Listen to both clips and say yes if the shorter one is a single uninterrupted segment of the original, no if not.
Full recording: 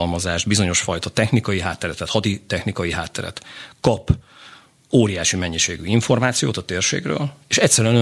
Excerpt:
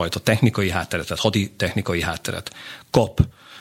yes